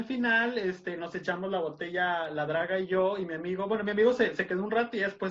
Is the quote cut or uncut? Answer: uncut